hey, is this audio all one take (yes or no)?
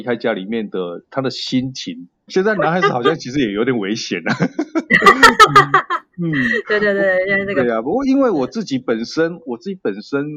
no